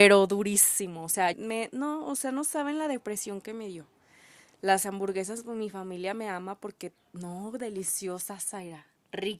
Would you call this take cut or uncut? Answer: cut